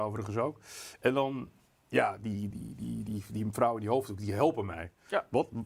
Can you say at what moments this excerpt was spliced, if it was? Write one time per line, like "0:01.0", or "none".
0:02.5